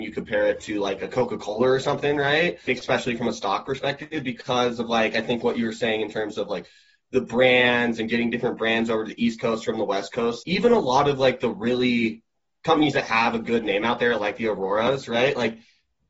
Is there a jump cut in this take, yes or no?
yes